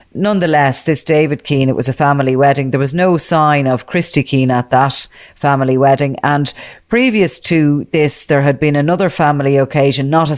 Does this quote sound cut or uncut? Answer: uncut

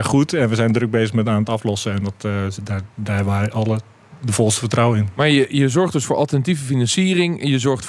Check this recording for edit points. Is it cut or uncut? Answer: uncut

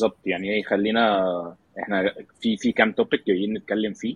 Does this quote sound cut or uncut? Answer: uncut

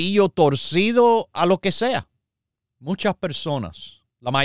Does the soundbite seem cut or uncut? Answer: cut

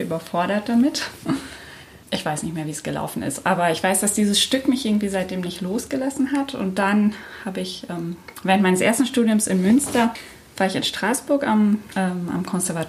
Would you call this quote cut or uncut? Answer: uncut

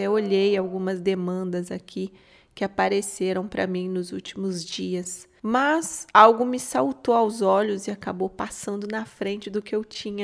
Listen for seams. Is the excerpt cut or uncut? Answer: uncut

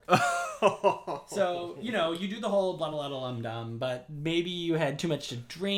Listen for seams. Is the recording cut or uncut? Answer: uncut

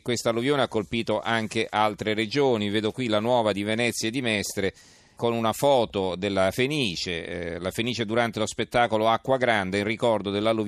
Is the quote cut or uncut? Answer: cut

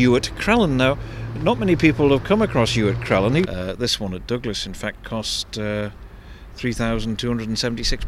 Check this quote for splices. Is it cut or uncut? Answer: cut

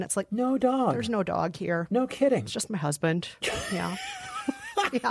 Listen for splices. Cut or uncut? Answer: uncut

